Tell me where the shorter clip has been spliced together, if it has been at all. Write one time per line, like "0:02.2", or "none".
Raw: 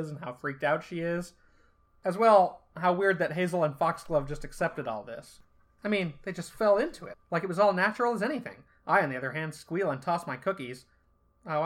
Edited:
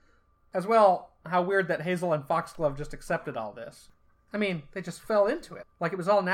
none